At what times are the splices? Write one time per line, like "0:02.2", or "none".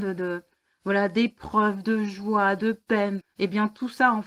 0:03.2